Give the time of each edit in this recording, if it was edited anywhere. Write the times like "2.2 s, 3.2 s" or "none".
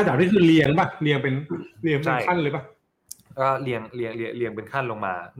none